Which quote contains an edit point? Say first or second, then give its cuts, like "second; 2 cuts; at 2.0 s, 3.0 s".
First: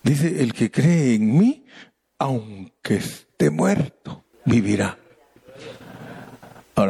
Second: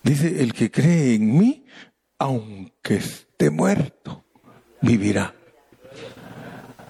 first; 1 cut; at 4.3 s